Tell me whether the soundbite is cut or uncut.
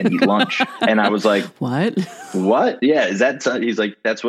uncut